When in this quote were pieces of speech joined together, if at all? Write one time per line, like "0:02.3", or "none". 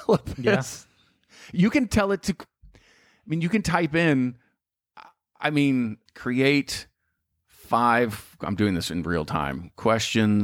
0:06.1